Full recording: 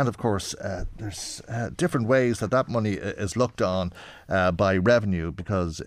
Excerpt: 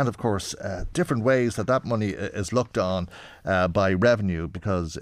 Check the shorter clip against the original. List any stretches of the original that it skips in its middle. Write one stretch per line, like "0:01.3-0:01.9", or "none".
0:00.9-0:01.8